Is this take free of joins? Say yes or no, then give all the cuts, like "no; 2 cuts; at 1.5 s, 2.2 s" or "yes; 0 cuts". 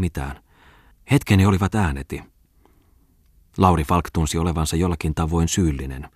no; 1 cut; at 0.9 s